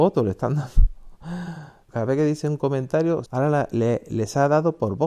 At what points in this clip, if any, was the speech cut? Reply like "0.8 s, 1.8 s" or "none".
1.9 s, 3.3 s